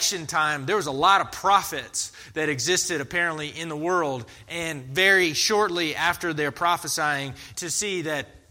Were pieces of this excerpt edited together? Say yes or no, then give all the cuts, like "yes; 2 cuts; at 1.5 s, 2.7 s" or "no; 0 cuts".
yes; 1 cut; at 7.5 s